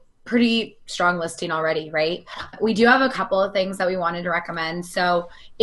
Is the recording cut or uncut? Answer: uncut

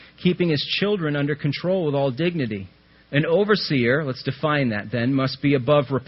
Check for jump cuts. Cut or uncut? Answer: cut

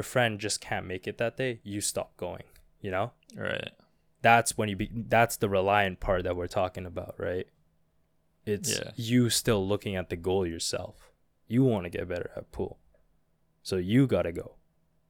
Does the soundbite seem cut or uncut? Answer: uncut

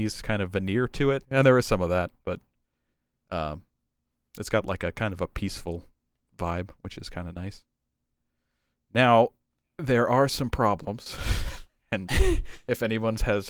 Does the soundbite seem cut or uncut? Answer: cut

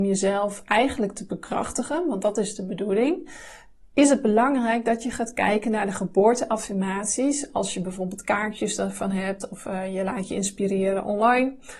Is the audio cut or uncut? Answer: uncut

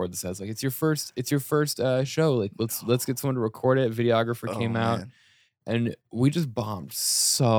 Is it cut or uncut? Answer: uncut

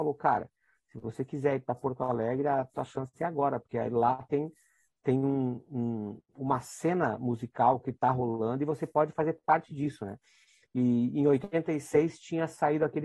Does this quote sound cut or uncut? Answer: uncut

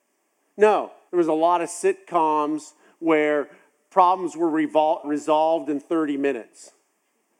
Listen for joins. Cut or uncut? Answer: cut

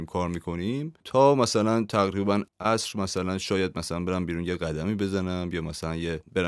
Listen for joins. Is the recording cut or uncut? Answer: cut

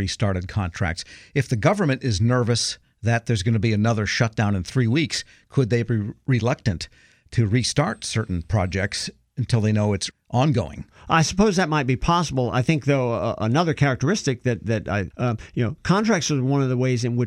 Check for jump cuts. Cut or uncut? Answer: cut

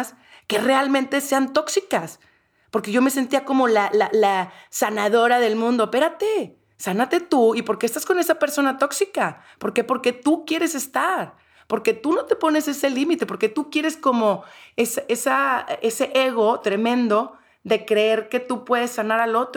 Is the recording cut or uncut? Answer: uncut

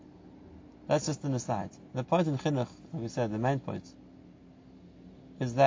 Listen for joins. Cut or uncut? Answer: uncut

